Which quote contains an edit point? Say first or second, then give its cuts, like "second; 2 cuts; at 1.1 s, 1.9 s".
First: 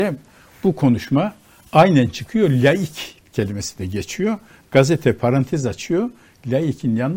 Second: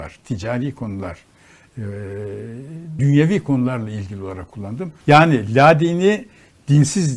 second; 2 cuts; at 3.0 s, 5.0 s